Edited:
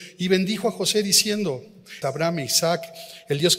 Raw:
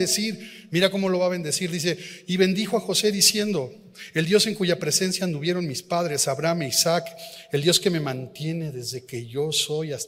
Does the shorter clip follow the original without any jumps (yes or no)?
no